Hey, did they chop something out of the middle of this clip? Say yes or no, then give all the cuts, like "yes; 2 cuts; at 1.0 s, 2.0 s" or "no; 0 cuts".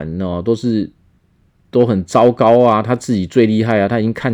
no; 0 cuts